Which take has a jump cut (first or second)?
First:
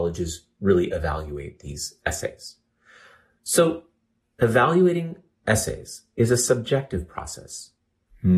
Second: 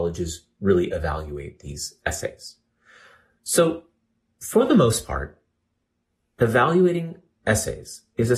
first